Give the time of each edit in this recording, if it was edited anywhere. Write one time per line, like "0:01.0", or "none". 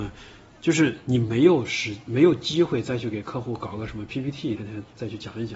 0:04.6